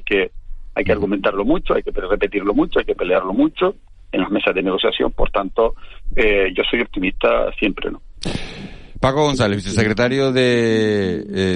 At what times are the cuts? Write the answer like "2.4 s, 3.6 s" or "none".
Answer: none